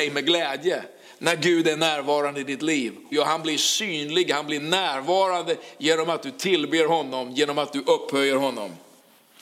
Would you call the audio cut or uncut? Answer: cut